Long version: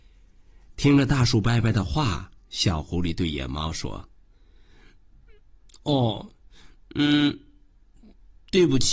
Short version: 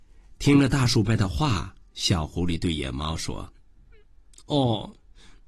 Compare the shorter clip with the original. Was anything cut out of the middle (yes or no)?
yes